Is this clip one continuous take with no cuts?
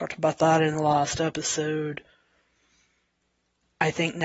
yes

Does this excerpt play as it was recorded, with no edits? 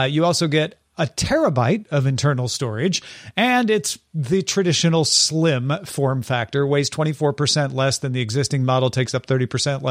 yes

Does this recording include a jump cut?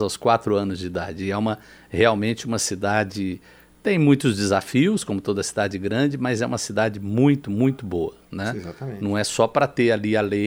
yes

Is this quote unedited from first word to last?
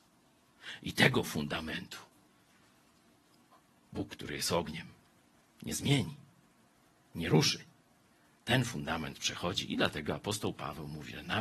yes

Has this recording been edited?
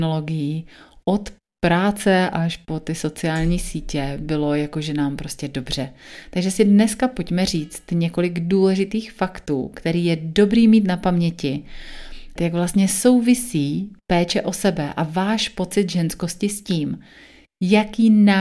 yes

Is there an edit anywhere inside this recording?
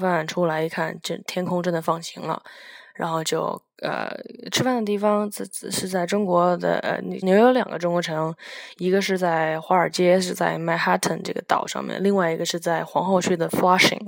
yes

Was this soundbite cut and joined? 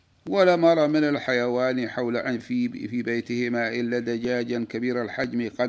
no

